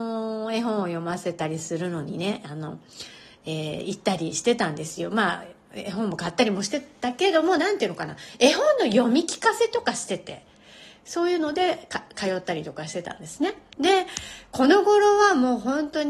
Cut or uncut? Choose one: uncut